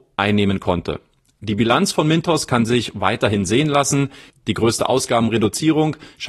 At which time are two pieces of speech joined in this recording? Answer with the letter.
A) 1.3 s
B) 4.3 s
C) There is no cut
B